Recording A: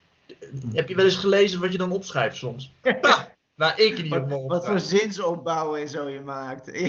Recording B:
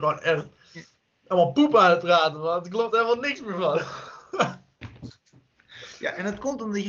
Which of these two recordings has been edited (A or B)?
A